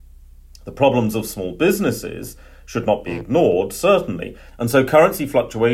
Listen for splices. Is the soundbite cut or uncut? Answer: cut